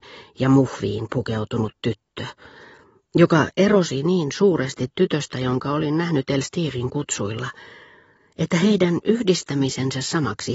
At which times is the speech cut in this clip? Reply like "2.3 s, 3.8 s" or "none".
none